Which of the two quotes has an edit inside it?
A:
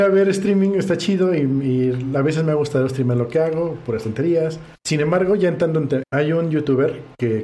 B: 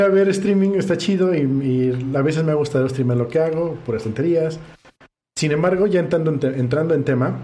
A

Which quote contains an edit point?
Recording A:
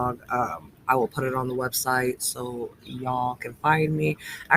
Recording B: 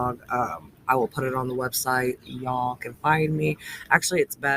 B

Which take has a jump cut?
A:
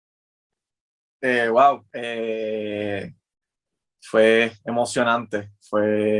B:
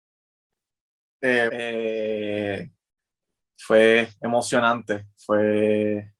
B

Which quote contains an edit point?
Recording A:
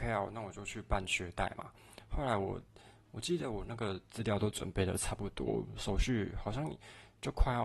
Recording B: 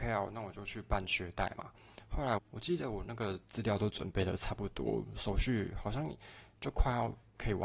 B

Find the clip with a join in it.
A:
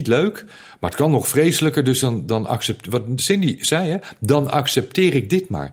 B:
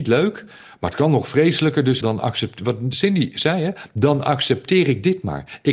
B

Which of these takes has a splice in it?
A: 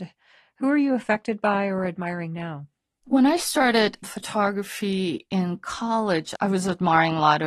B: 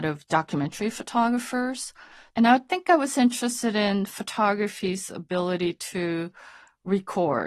B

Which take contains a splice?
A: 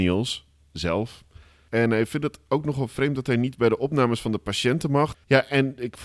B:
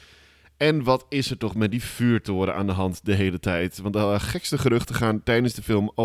A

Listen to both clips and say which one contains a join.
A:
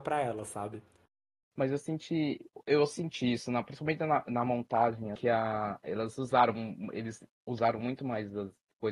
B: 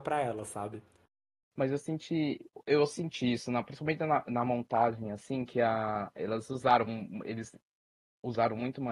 A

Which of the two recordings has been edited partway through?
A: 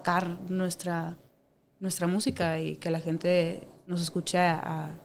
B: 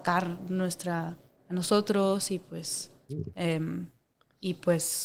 B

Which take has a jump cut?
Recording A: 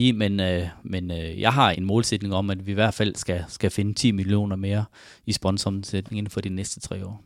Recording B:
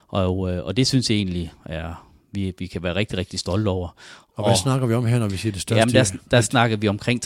A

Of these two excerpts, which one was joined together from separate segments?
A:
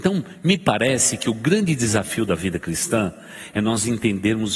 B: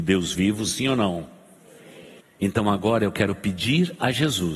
B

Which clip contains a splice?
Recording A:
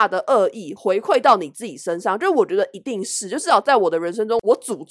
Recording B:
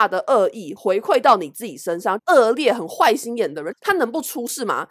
B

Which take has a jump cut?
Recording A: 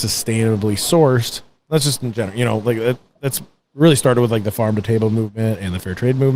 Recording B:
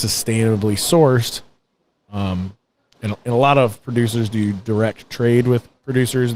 A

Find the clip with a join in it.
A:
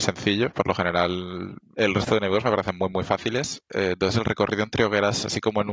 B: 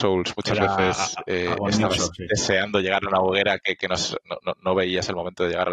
A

